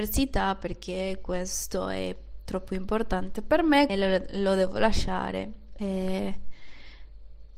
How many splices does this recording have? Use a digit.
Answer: 2